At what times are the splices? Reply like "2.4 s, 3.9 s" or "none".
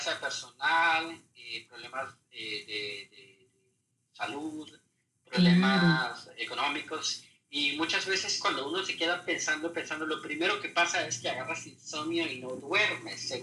none